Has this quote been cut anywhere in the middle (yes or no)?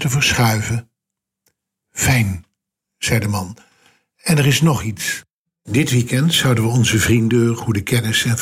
no